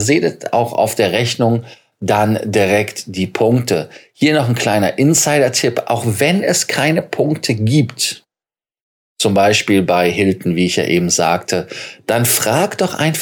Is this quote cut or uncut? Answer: uncut